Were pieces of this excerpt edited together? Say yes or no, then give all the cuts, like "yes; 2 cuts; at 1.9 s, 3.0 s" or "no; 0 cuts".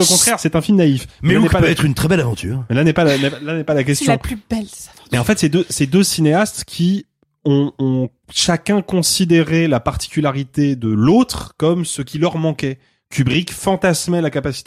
no; 0 cuts